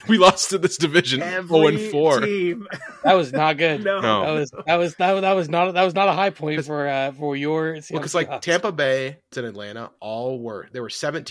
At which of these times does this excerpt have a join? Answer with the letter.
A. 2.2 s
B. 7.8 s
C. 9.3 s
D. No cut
C